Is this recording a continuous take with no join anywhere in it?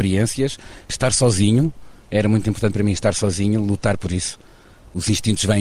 yes; 0 cuts

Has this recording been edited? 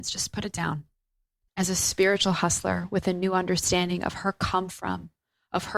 yes; 1 cut; at 1.5 s

